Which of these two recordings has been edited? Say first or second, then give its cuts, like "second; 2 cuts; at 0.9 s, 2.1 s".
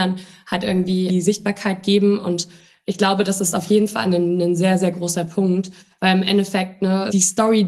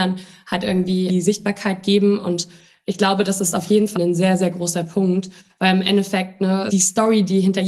second; 1 cut; at 4.0 s